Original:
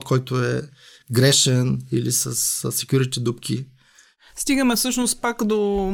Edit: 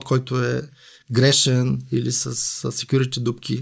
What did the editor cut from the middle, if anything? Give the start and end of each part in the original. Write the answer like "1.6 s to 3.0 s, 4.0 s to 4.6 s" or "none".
none